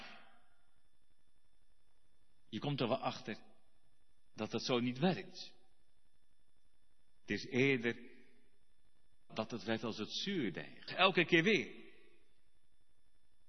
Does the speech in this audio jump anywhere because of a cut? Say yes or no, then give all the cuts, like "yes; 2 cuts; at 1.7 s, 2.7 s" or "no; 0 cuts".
yes; 2 cuts; at 9.3 s, 10.9 s